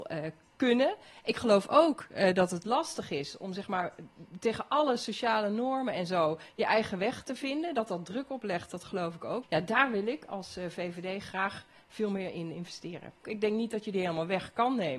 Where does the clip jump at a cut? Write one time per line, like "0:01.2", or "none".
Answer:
0:09.4
0:13.2